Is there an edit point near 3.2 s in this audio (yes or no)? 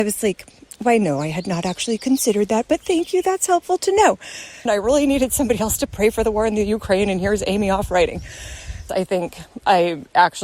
no